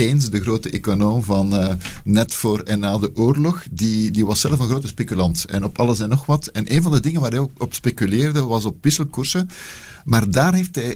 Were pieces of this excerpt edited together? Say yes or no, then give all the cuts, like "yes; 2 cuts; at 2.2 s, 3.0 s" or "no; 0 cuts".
no; 0 cuts